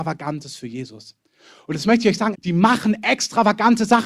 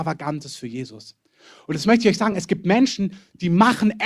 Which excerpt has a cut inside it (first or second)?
first